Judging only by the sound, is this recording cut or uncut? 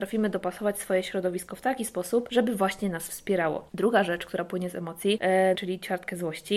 cut